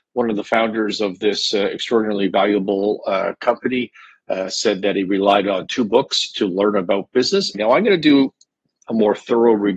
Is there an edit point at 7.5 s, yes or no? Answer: yes